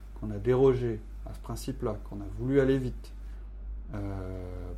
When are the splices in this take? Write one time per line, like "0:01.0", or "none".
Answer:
none